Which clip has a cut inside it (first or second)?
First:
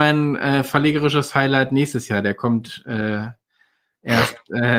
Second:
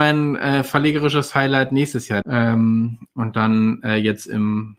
second